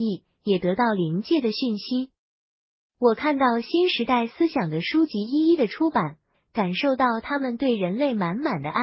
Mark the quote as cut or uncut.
cut